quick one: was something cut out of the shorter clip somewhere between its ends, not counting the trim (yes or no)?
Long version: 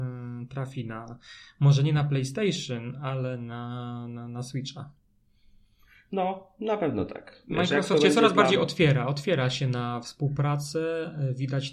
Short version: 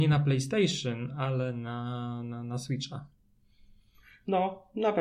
no